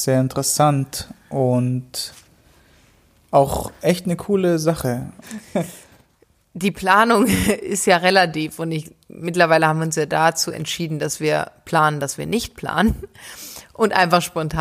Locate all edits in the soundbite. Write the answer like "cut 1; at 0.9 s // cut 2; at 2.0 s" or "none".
cut 1; at 5.2 s